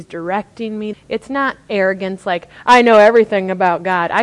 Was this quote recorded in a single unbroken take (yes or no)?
no